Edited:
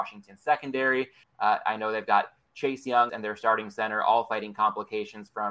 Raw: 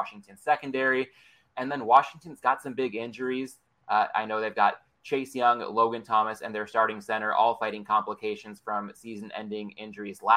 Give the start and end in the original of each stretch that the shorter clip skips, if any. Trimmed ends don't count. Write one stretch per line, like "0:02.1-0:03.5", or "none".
0:01.2-0:03.7
0:05.6-0:06.4